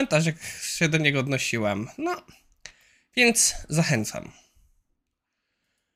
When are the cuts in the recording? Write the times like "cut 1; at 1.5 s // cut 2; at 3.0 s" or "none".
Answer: none

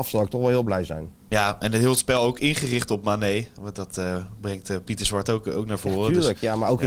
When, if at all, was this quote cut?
cut 1; at 1.2 s

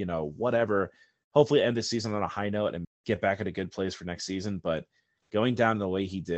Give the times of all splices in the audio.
cut 1; at 2.8 s

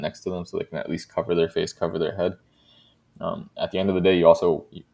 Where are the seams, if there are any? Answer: none

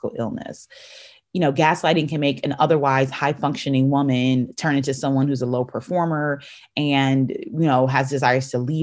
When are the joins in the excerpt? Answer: none

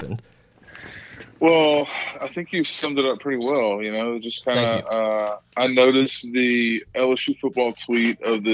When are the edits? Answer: none

